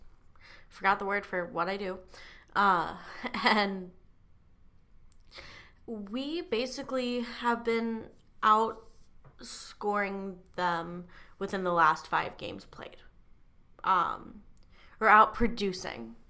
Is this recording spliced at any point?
no; 0 cuts

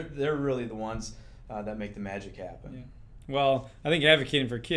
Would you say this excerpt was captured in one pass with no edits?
yes; 0 cuts

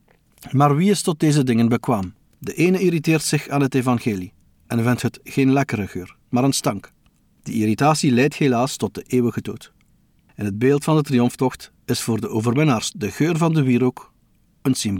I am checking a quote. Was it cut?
yes; 2 cuts; at 2.3 s, 10.3 s

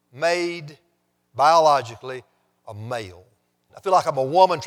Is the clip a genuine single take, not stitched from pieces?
no; 1 cut; at 3.7 s

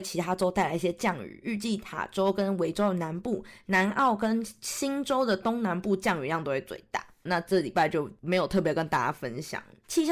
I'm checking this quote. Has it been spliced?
yes; 1 cut; at 7.3 s

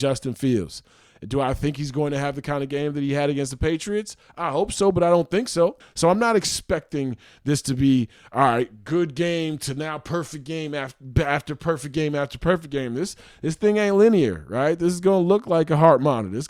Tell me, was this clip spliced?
yes; 1 cut; at 5.8 s

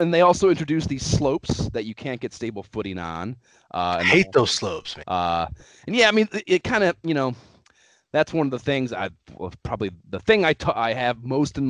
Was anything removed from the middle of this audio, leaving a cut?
yes; 1 cut; at 5.0 s

